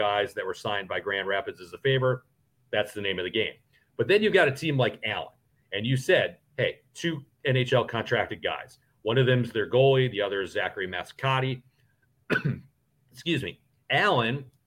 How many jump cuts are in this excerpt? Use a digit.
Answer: 0